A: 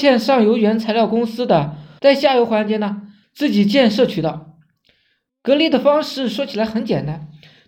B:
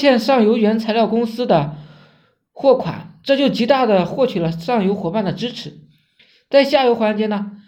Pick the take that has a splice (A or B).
A